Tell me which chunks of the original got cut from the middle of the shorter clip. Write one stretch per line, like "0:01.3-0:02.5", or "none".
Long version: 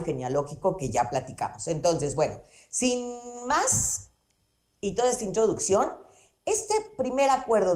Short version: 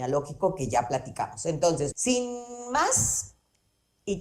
0:02.1-0:02.7